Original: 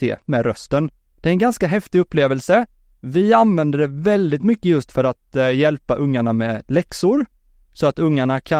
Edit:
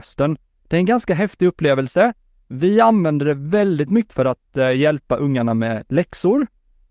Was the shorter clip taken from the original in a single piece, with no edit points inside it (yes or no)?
no